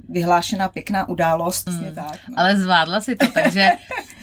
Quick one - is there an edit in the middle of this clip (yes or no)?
yes